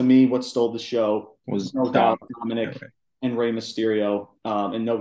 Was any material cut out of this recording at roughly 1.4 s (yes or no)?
yes